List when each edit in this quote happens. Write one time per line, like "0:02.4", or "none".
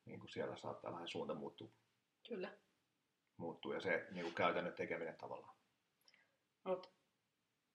none